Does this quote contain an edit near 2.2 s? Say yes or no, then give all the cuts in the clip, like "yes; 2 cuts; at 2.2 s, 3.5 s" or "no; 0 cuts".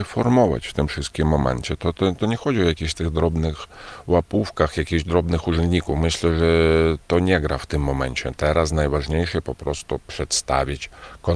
yes; 1 cut; at 2.2 s